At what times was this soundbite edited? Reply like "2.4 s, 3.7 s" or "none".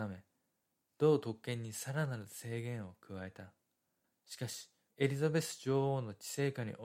4.9 s